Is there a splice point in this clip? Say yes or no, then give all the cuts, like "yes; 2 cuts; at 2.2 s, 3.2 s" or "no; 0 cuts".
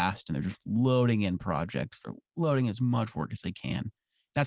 no; 0 cuts